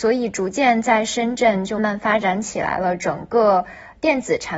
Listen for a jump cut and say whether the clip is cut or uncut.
cut